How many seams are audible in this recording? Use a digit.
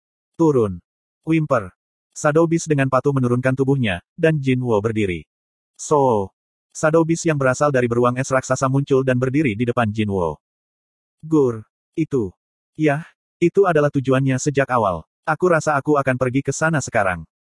3